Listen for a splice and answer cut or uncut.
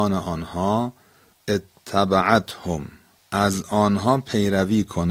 uncut